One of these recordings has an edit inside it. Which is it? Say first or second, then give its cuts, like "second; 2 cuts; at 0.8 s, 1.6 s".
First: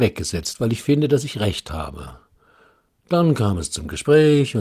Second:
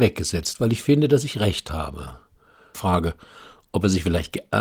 second; 1 cut; at 2.7 s